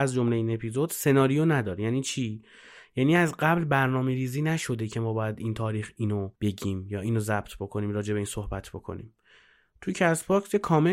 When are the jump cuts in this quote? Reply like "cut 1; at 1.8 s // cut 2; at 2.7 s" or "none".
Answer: cut 1; at 6.3 s